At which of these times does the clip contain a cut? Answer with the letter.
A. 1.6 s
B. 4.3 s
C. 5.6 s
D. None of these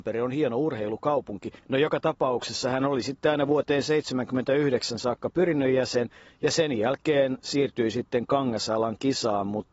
A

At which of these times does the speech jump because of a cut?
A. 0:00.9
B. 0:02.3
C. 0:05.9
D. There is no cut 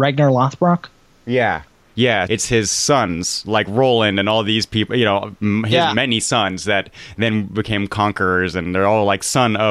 B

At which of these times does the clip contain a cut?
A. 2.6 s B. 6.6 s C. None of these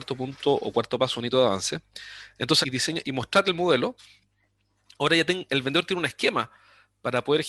A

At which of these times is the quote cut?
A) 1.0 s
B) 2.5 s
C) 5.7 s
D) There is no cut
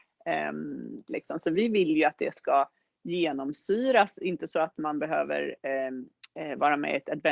A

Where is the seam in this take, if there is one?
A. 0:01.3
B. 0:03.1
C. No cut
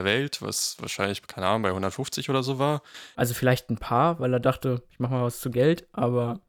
B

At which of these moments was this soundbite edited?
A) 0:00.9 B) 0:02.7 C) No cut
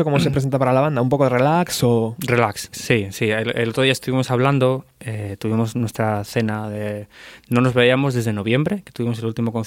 B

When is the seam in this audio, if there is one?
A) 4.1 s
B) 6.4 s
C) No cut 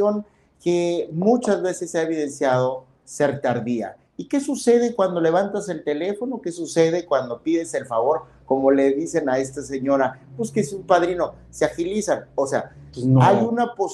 A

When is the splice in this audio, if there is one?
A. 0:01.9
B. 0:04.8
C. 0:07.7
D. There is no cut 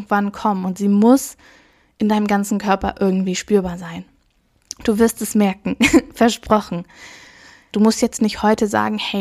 C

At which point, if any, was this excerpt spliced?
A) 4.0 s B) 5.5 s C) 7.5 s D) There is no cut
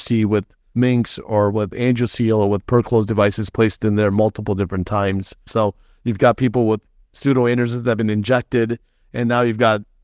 B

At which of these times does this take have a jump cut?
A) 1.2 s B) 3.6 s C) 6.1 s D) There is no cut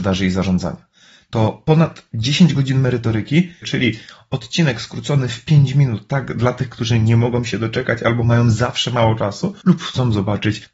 B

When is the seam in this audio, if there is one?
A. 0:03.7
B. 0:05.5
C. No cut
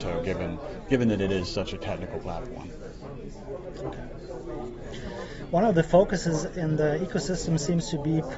C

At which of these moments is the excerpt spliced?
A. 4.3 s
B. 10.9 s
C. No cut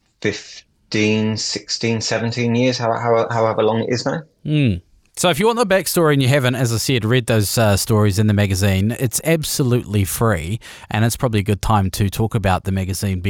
C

